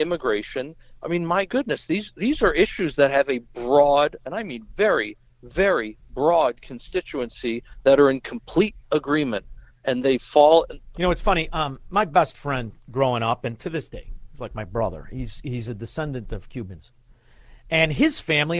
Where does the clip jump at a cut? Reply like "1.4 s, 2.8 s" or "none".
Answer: 10.9 s